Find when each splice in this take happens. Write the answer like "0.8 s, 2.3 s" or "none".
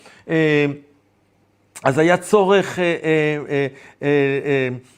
none